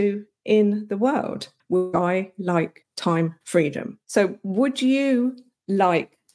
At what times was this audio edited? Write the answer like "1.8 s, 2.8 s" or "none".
1.6 s, 4.0 s